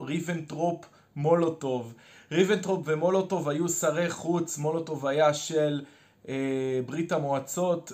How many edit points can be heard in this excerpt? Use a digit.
0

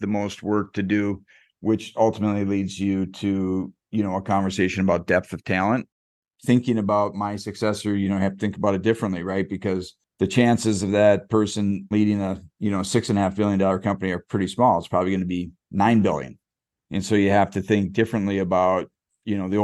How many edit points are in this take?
0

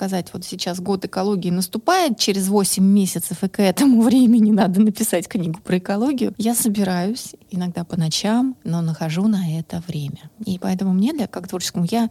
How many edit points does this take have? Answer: 0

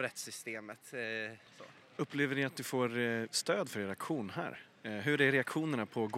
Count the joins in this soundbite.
1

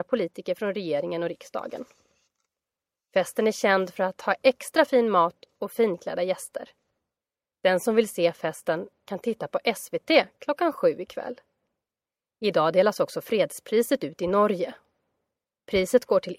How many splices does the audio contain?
0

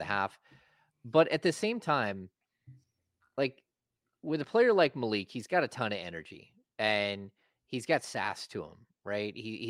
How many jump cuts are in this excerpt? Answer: 0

